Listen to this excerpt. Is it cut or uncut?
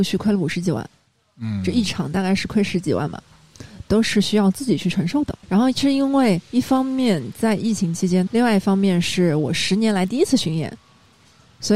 cut